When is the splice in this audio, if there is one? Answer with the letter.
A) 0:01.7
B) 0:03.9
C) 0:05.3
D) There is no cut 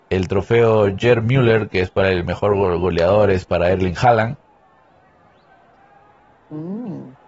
D